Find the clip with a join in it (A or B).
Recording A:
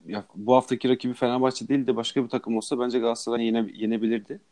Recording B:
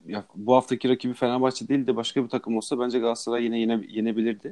A